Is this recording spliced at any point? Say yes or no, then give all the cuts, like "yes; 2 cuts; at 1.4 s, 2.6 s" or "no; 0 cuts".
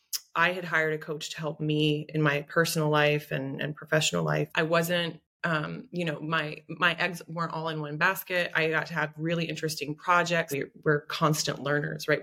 yes; 2 cuts; at 4.5 s, 10.5 s